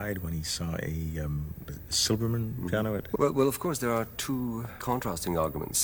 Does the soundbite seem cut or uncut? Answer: cut